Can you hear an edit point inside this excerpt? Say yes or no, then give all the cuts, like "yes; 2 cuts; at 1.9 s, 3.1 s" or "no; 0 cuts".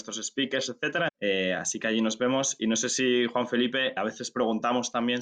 yes; 2 cuts; at 1.1 s, 4.0 s